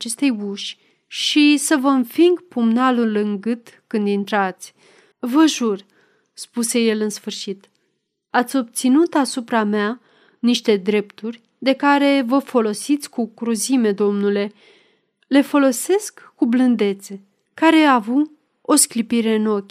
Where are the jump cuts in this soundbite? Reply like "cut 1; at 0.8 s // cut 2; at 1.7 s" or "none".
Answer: cut 1; at 5.1 s // cut 2; at 17.5 s